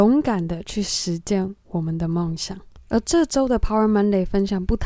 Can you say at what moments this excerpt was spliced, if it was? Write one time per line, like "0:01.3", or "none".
0:02.9